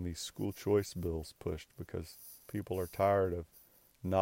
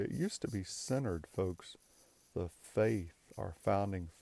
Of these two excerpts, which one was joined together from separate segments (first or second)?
second